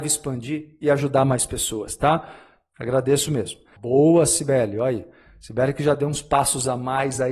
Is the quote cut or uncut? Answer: cut